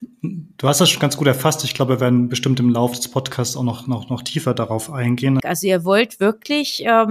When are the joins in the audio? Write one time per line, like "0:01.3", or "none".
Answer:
0:05.4